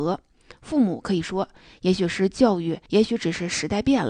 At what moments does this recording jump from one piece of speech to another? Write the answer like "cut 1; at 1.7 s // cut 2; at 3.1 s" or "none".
cut 1; at 2.9 s

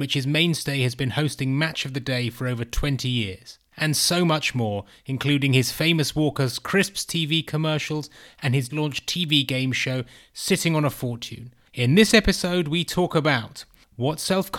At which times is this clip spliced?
cut 1; at 8.7 s // cut 2; at 11.7 s

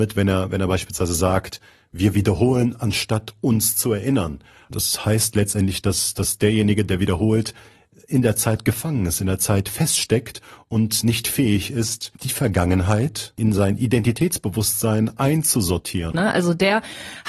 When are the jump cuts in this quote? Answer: cut 1; at 12.2 s // cut 2; at 16.1 s

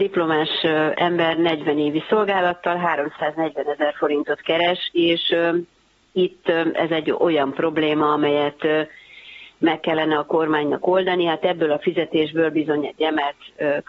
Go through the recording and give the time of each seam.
none

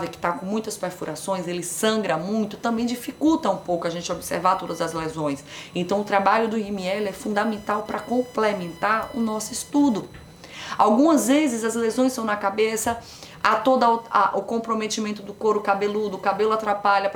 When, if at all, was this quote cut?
none

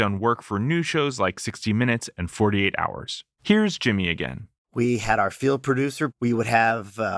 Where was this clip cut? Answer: cut 1; at 3.4 s // cut 2; at 6.1 s

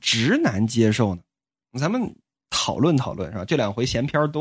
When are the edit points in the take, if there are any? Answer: none

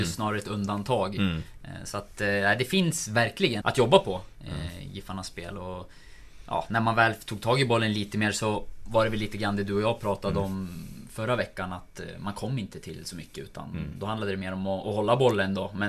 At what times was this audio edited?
cut 1; at 3.6 s

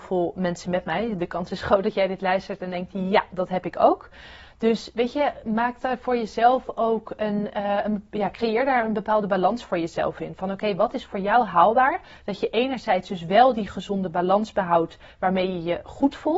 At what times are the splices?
none

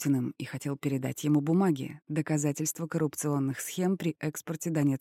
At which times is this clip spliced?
none

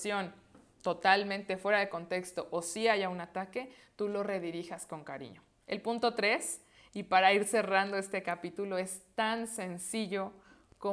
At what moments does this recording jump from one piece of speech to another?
none

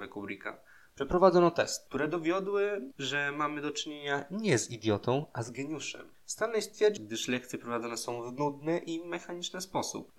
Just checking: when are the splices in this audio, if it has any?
cut 1; at 7.0 s

